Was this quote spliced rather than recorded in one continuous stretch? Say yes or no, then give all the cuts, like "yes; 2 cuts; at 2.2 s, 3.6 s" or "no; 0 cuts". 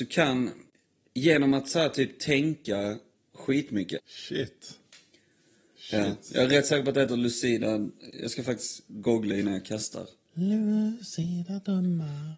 yes; 1 cut; at 4.0 s